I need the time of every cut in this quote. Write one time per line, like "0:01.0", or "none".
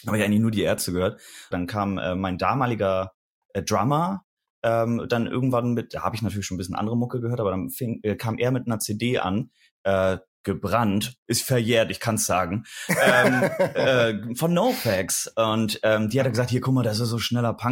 0:01.5

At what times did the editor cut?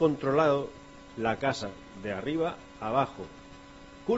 0:01.1

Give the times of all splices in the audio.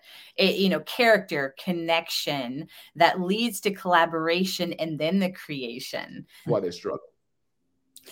0:01.5
0:06.4

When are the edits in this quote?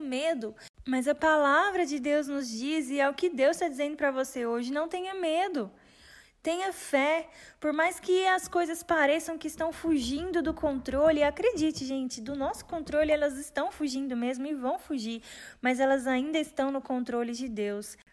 none

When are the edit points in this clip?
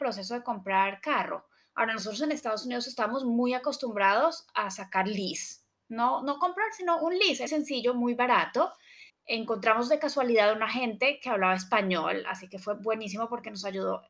0:07.5
0:09.1

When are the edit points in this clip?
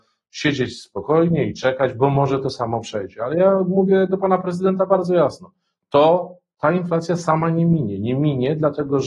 none

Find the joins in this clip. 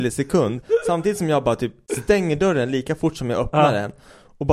none

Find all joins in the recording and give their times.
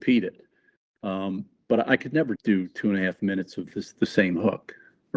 0:02.4

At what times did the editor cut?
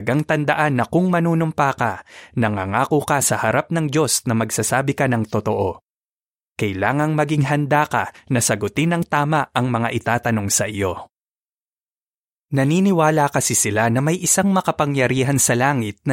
0:12.3

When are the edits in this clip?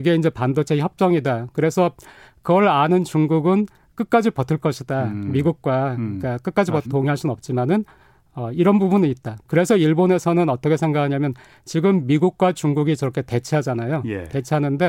0:06.8
0:09.4

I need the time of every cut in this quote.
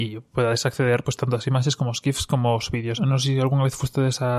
0:03.0

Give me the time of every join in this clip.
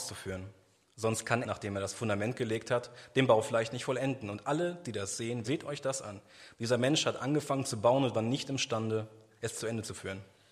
0:01.4
0:05.4

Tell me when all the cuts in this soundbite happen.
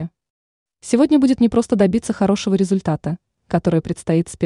0:03.4

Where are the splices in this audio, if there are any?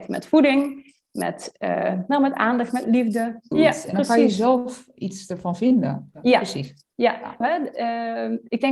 0:03.5
0:06.1
0:07.4

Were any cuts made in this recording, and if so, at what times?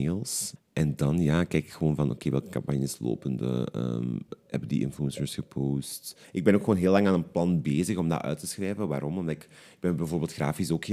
none

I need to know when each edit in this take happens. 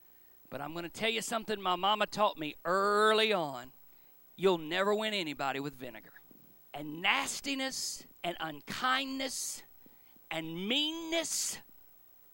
0:06.6
0:08.1

